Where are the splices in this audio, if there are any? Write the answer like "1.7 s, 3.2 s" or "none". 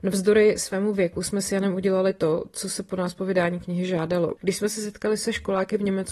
4.4 s